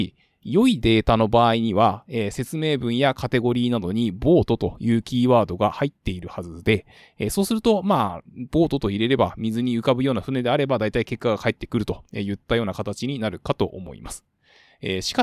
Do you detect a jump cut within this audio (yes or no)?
no